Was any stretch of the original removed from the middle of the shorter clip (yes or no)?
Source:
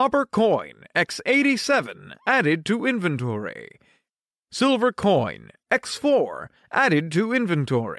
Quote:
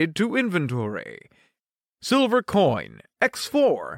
no